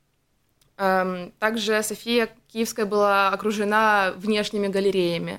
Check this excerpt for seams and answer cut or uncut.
uncut